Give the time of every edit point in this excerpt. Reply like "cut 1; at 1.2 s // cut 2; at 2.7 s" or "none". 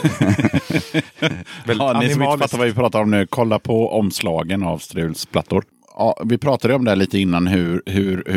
none